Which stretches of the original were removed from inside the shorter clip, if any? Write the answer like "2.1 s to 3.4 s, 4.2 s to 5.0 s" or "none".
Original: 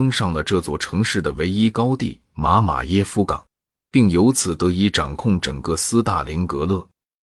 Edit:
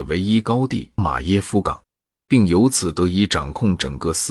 2.3 s to 2.6 s